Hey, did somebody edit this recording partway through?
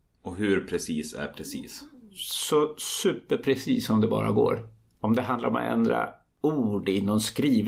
no; 0 cuts

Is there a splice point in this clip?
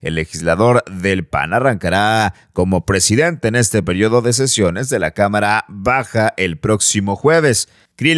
no; 0 cuts

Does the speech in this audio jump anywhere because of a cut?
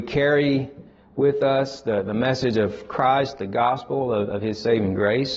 no; 0 cuts

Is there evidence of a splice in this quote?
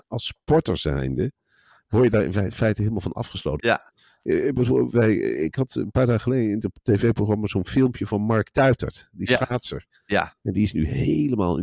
yes; 1 cut; at 3.6 s

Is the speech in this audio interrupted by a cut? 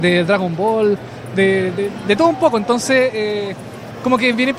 no; 0 cuts

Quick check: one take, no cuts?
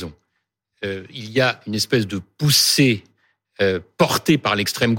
yes; 0 cuts

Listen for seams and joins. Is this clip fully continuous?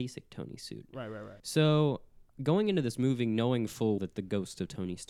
no; 2 cuts; at 1.4 s, 4.0 s

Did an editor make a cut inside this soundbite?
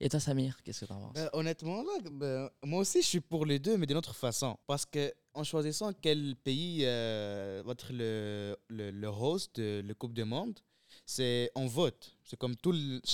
no; 0 cuts

